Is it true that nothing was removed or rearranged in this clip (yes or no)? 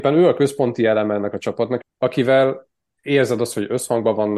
no